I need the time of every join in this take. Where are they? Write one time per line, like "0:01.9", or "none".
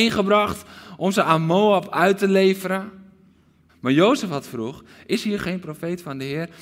0:03.7